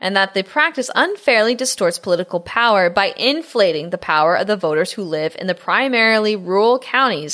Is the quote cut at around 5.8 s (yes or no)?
no